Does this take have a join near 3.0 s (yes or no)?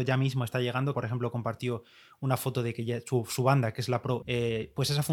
no